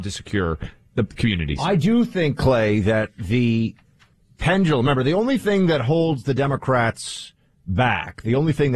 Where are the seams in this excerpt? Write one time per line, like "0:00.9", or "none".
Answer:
none